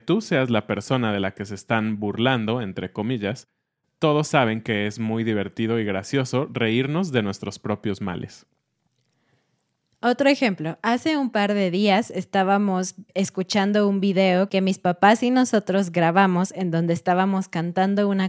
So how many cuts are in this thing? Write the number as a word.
zero